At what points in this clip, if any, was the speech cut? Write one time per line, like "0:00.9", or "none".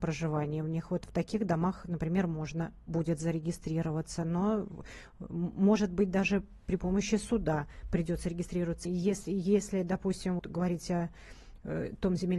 0:08.8
0:10.4